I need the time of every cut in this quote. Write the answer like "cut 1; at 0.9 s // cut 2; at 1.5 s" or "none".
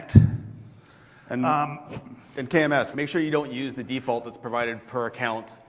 cut 1; at 2.9 s